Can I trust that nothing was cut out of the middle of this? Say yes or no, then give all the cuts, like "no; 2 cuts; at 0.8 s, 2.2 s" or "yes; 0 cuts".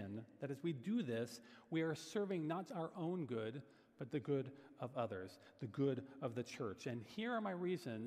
no; 1 cut; at 2.7 s